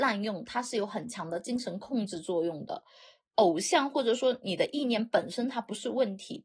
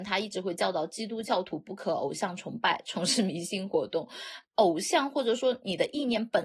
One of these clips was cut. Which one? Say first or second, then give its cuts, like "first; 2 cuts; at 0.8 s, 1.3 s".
second; 1 cut; at 4.4 s